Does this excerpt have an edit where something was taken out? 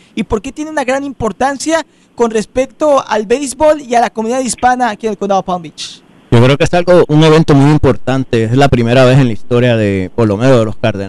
no; 0 cuts

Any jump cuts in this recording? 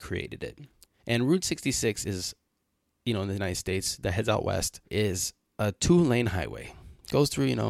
yes; 2 cuts; at 1.0 s, 4.9 s

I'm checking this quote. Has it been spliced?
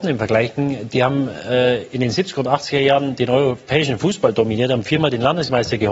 no; 0 cuts

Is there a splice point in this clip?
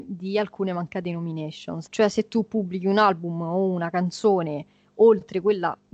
yes; 1 cut; at 1.9 s

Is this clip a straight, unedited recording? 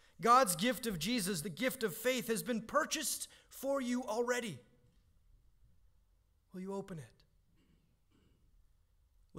no; 1 cut; at 1.4 s

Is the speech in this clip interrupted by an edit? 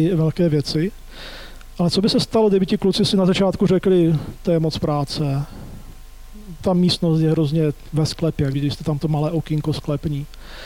yes; 2 cuts; at 6.6 s, 8.5 s

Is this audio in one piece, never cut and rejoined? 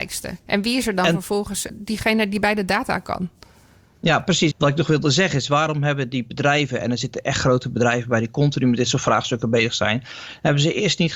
no; 2 cuts; at 1.7 s, 4.5 s

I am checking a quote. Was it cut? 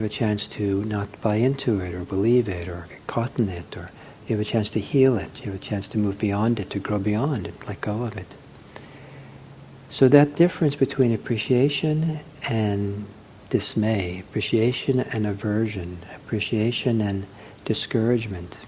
no; 0 cuts

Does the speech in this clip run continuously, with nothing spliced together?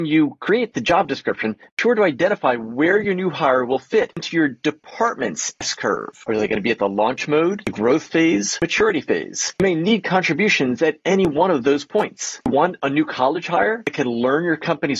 yes; 0 cuts

